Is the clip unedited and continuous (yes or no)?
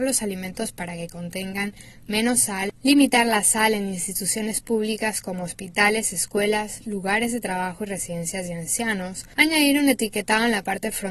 yes